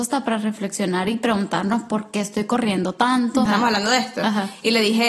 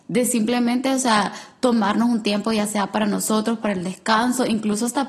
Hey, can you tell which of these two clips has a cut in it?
first; 1 cut; at 3.5 s

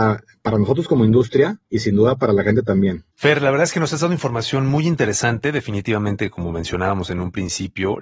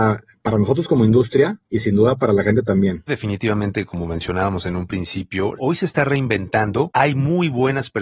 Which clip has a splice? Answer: second; 2 cuts; at 3.1 s, 5.6 s

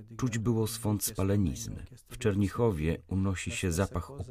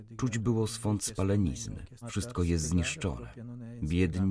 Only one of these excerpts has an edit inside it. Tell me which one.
second; 1 cut; at 2.0 s

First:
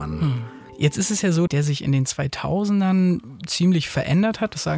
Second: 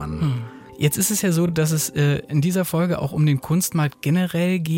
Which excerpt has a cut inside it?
first; 1 cut; at 1.5 s

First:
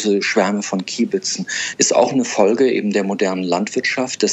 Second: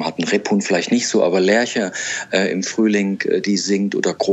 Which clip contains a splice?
first; 1 cut; at 1.8 s

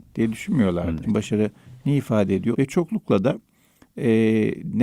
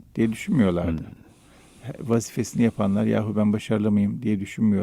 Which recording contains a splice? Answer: first; 2 cuts; at 1.0 s, 2.5 s

